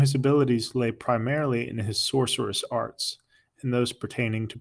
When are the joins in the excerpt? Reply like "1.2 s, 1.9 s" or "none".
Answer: none